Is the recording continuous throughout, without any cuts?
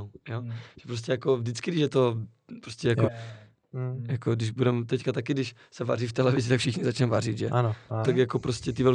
no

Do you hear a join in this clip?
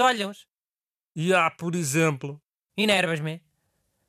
yes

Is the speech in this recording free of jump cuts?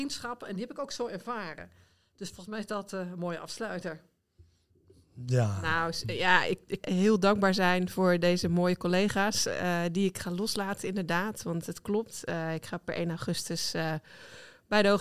no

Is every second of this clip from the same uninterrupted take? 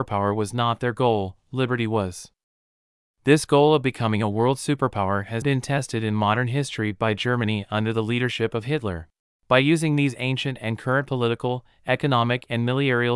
no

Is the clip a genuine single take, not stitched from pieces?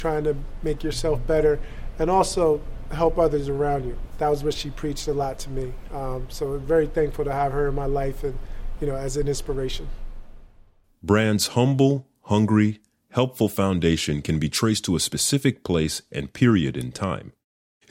yes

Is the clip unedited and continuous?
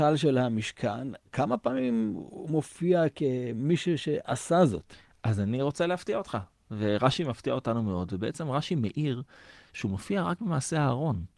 yes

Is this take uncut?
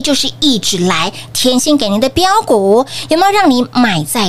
no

